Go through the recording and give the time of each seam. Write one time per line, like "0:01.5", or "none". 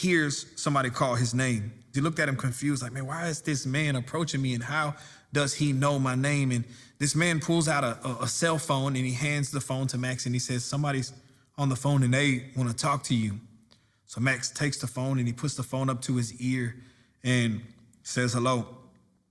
0:01.9